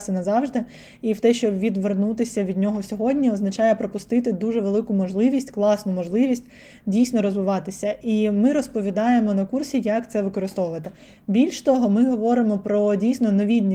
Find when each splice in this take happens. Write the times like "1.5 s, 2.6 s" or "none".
none

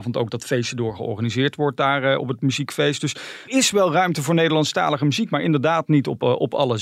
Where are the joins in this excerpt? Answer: 3.5 s

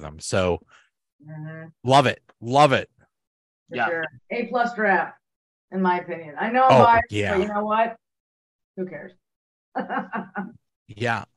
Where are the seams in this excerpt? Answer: 4.2 s

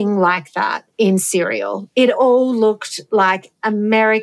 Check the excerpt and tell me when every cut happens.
0.9 s

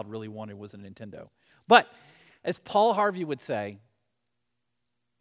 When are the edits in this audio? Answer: none

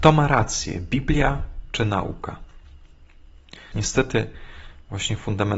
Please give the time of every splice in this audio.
3.7 s

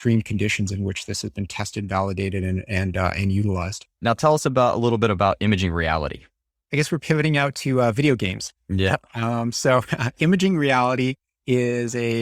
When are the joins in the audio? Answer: 3.9 s

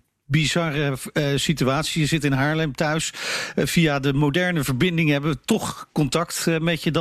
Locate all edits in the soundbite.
none

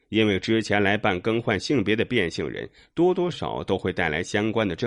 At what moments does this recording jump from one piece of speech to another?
3.3 s

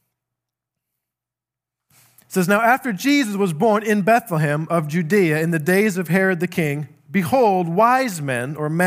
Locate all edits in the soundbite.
none

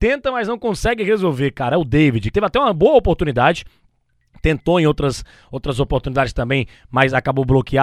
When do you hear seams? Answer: 2.3 s

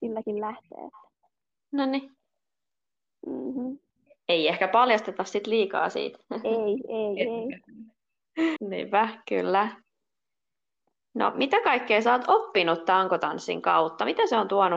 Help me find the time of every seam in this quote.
8.6 s

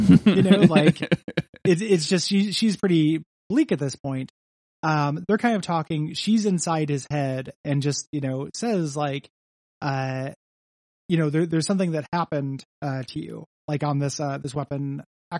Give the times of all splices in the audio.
none

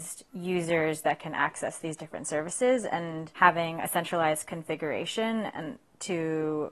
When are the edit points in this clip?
none

